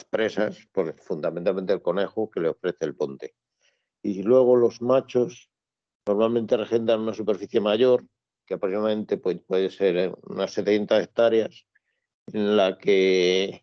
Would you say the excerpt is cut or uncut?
uncut